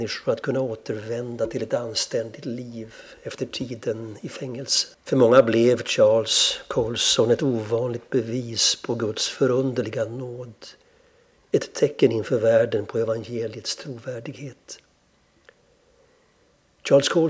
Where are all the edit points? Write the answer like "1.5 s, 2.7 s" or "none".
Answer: 4.9 s